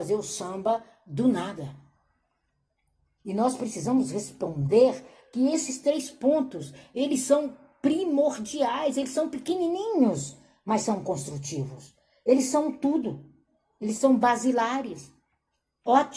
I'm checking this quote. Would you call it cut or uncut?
uncut